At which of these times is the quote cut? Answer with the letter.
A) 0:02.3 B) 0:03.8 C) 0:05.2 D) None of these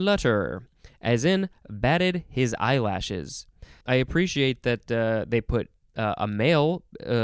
B